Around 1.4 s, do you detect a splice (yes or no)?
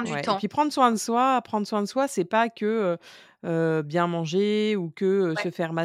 no